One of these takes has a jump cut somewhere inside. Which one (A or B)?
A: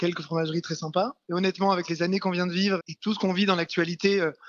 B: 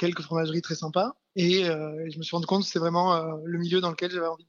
A